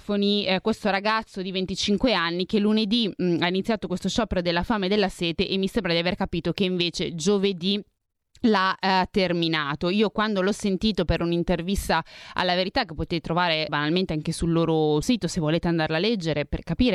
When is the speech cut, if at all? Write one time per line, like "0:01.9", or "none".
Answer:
0:13.7
0:15.0

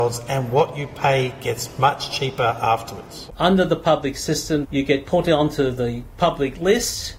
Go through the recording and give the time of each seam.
0:03.3

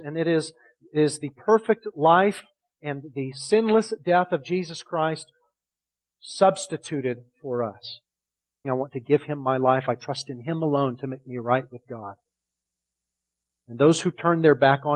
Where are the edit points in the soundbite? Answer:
0:08.6
0:13.5

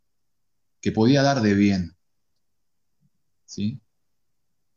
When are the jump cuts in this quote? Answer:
none

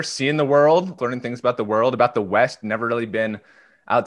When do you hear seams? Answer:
0:01.0

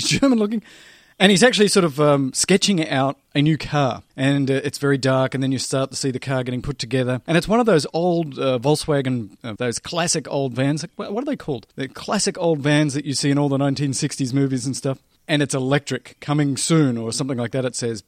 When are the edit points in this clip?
0:09.6
0:11.7

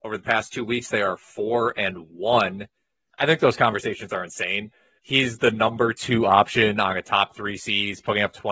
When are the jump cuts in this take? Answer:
0:03.1
0:05.0

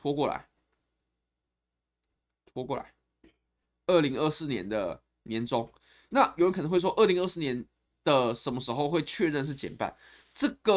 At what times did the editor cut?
none

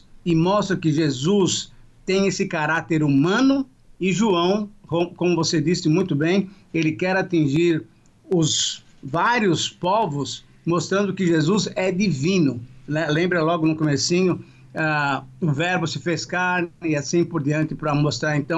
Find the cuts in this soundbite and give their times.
none

